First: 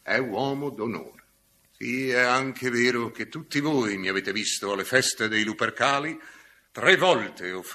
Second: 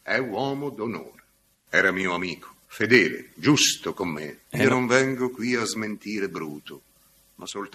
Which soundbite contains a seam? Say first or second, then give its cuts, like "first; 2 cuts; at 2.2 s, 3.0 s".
second; 2 cuts; at 1.5 s, 4.4 s